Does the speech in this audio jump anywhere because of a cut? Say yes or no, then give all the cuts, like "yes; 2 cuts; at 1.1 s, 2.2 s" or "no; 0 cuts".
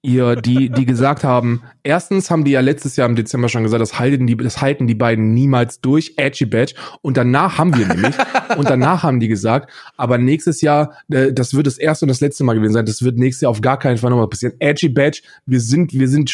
no; 0 cuts